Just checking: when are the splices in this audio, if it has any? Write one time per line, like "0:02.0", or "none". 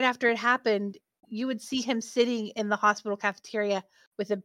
none